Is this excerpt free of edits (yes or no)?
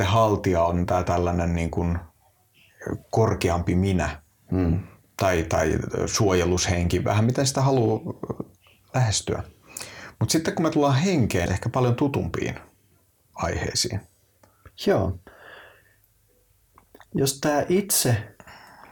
no